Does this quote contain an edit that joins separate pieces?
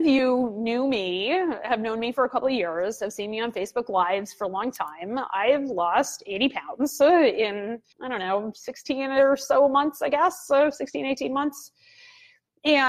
yes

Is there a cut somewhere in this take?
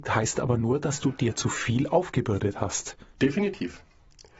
yes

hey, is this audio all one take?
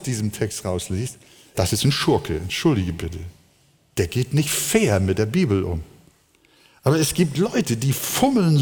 yes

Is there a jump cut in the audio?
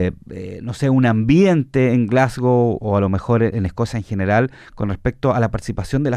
yes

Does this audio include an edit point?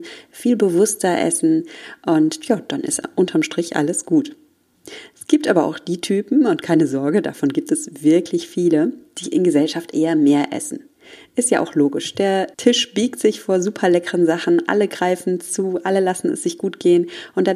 yes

